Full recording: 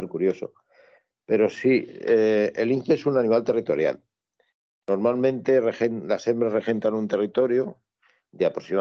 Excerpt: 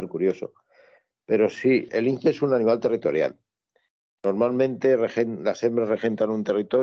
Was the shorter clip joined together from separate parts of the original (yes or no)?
yes